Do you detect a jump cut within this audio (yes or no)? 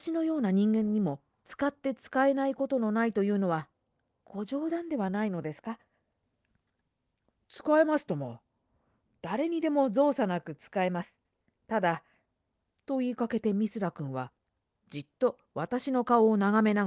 no